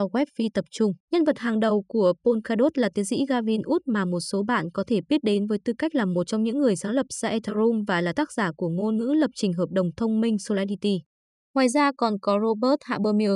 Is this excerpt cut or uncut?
cut